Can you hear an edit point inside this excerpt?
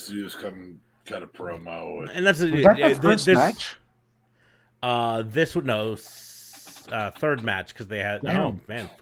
yes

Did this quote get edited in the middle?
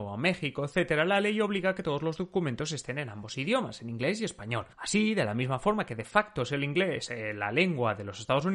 yes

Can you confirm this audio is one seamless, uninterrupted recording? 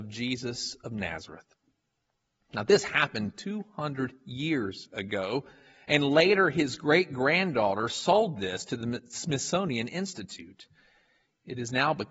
yes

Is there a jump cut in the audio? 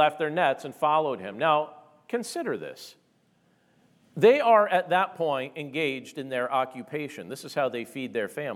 no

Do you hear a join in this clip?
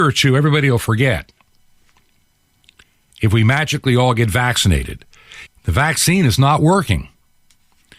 yes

